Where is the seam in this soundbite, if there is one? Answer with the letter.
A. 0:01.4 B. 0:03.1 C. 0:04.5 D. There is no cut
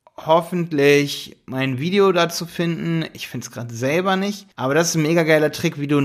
C